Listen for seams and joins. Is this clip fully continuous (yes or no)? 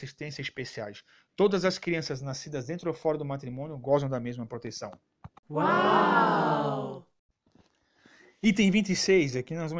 yes